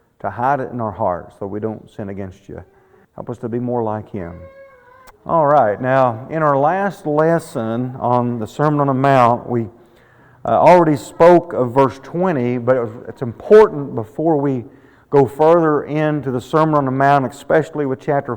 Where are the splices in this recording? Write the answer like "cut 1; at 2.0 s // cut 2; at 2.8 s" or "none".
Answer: cut 1; at 3.0 s // cut 2; at 5.1 s